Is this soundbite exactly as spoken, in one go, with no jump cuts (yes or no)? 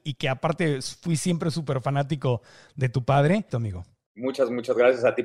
no